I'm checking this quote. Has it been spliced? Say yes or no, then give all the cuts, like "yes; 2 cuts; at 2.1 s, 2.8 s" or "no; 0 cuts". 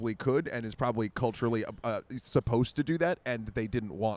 no; 0 cuts